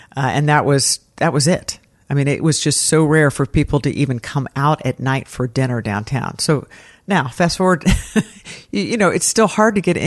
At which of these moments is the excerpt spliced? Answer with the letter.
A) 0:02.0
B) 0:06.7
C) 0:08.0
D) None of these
D